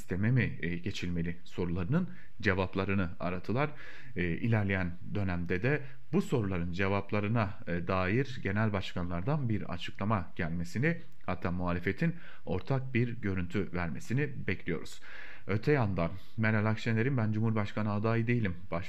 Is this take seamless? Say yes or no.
yes